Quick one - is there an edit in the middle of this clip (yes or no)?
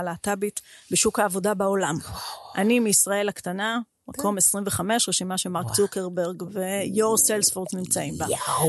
no